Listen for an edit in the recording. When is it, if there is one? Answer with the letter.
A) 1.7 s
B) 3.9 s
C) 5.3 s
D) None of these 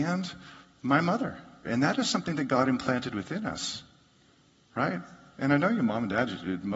A